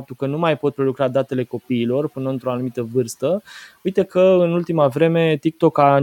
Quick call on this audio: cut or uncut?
uncut